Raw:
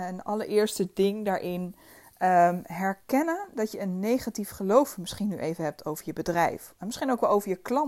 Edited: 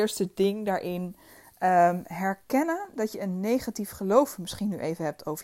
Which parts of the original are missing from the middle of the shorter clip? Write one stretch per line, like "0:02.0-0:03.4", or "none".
none